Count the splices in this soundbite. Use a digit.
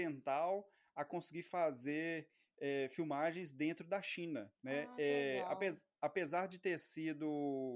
1